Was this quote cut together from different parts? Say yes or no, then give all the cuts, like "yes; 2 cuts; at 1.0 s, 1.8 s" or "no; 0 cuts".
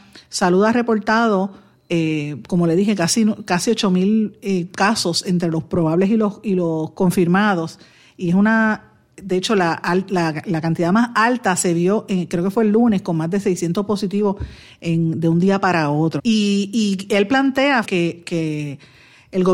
yes; 2 cuts; at 16.2 s, 17.8 s